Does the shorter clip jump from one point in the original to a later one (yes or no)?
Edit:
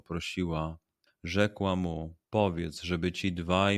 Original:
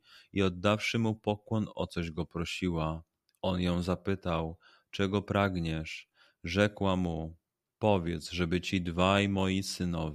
yes